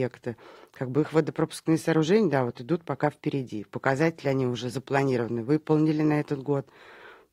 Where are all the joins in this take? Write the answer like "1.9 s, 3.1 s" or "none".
none